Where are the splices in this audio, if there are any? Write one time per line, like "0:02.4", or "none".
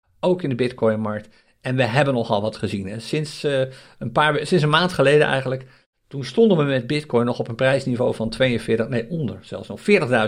none